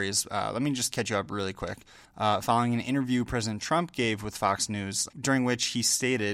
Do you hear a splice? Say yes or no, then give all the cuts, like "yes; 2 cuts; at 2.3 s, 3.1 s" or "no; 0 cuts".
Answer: yes; 2 cuts; at 2.1 s, 5.1 s